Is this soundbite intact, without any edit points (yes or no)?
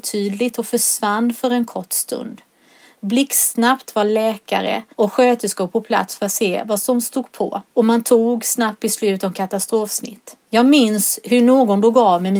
no